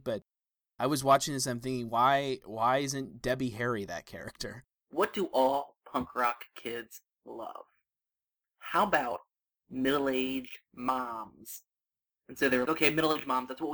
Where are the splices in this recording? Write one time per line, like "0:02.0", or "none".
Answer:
0:04.7
0:12.6